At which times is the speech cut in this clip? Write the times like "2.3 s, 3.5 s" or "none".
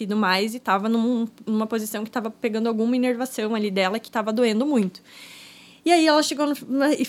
none